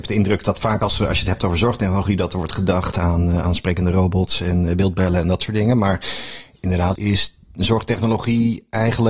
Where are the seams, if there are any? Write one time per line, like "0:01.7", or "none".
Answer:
0:03.4
0:07.0